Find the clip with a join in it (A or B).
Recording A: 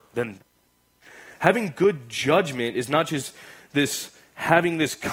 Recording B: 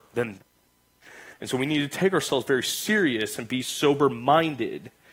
B